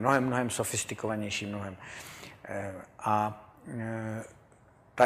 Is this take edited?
no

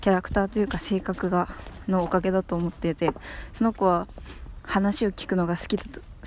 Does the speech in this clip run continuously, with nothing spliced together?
yes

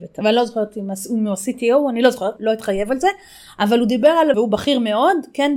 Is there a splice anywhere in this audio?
yes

